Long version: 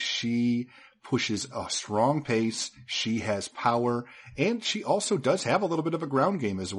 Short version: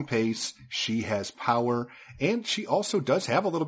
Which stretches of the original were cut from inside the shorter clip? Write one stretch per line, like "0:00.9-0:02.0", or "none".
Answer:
none